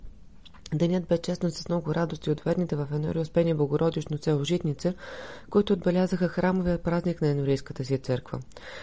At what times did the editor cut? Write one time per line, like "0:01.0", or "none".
none

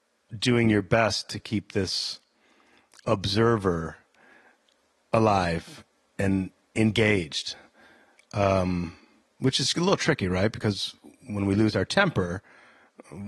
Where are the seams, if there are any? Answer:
none

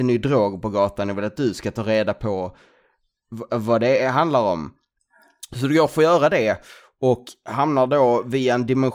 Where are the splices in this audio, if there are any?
none

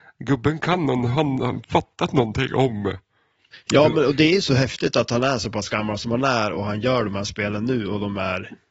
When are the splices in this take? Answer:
none

